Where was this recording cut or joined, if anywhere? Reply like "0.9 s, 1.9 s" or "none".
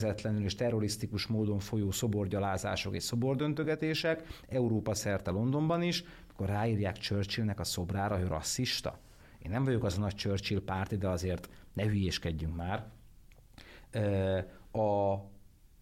none